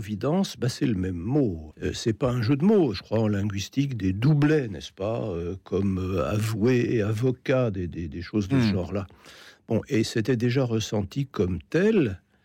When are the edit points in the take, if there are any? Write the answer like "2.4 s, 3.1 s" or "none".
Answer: 1.7 s, 2.9 s

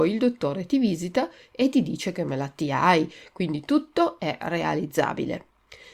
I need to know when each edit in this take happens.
none

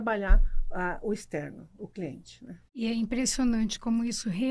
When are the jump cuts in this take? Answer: 2.7 s

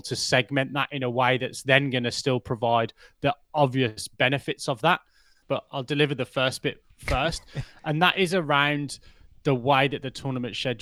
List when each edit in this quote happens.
5.4 s

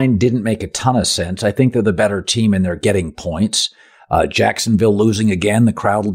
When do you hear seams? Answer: none

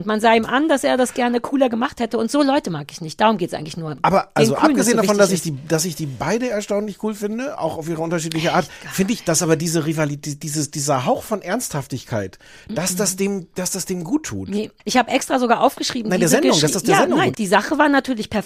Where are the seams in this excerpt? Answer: 14.8 s, 17.3 s

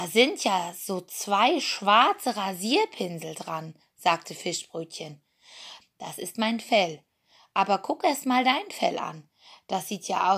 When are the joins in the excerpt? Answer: 5.8 s

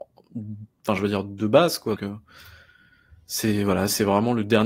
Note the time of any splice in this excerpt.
1.9 s

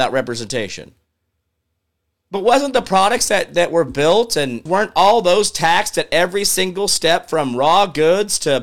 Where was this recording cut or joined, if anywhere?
4.7 s

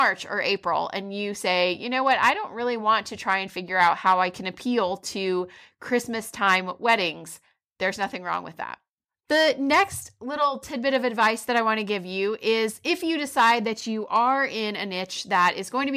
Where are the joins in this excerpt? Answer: none

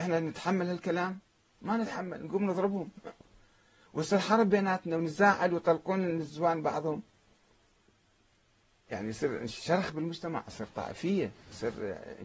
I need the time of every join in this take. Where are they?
8.9 s

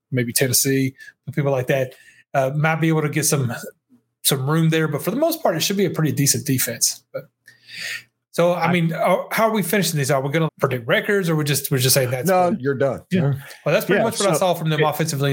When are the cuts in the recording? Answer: 10.5 s, 12.5 s

